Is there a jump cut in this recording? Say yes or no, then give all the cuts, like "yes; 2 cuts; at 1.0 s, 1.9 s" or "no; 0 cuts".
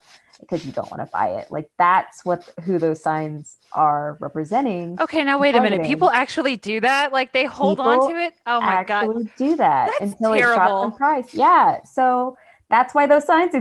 no; 0 cuts